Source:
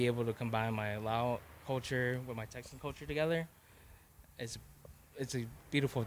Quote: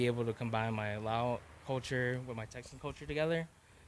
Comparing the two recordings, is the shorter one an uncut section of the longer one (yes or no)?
yes